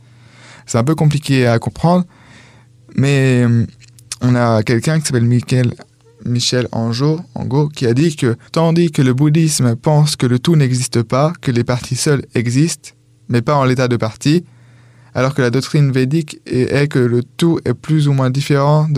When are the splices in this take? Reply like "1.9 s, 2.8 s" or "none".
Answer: 8.5 s